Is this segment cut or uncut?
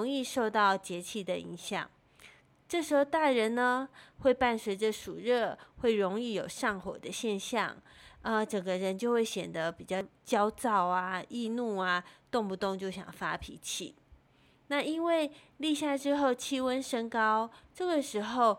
uncut